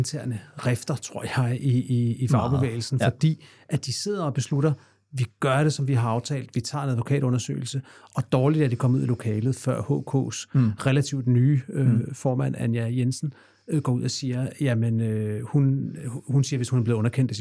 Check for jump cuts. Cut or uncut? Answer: uncut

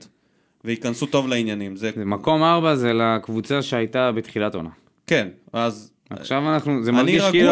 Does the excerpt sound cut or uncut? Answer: cut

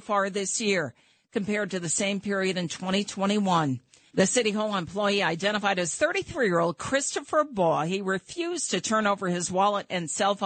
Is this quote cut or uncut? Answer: cut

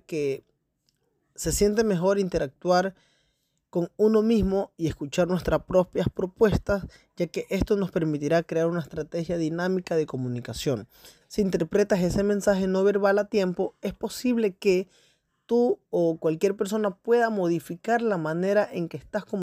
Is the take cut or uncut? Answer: cut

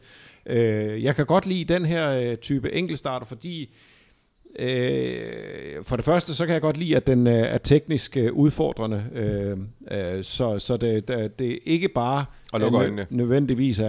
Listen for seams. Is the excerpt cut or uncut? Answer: uncut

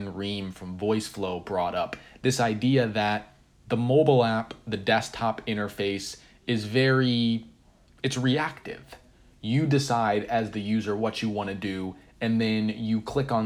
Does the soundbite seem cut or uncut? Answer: uncut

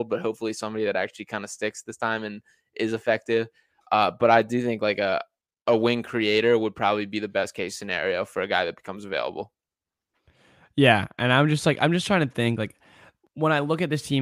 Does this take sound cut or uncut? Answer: uncut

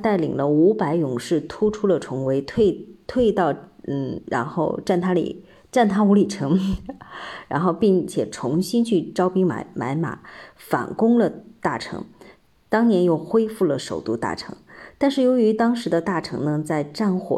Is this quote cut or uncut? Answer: uncut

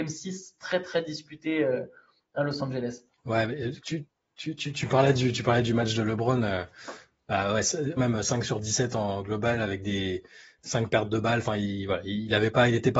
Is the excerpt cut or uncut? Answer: cut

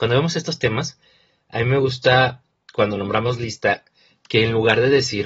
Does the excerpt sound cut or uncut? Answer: uncut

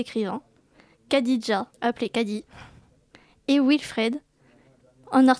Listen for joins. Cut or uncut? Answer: cut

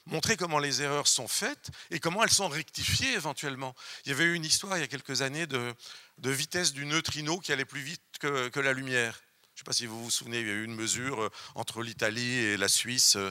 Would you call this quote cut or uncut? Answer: uncut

